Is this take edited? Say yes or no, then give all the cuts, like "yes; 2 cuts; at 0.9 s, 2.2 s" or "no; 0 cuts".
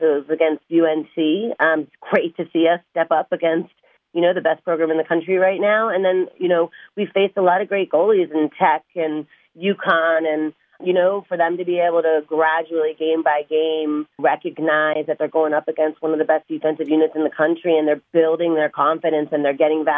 yes; 2 cuts; at 10.8 s, 14.2 s